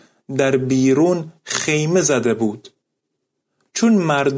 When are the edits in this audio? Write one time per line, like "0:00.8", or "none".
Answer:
none